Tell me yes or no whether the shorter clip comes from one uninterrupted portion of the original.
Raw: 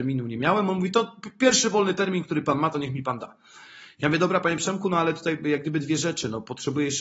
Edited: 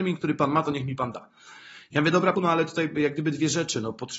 no